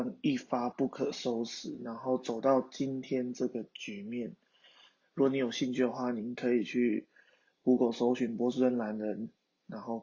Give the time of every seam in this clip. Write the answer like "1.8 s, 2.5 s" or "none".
5.0 s